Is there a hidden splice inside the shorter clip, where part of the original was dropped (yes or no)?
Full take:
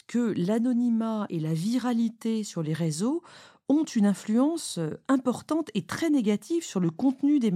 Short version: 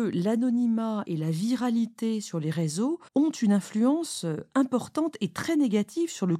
yes